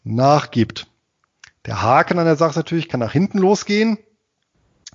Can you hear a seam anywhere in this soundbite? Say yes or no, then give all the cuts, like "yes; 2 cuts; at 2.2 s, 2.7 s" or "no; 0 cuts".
no; 0 cuts